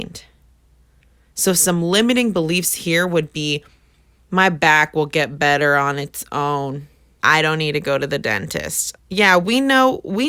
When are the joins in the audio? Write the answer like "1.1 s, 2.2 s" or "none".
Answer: 7.2 s, 9.0 s

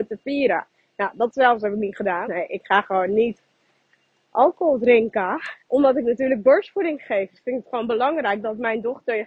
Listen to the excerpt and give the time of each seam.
2.2 s, 5.6 s

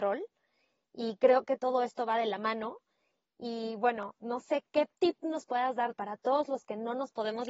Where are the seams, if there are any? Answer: 1.6 s

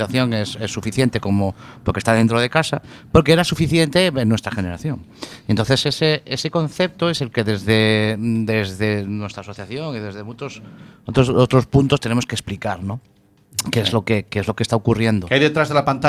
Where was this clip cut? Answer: none

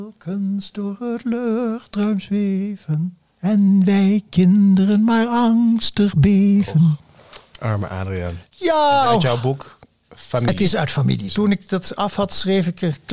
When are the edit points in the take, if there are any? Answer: 9.1 s, 11.3 s

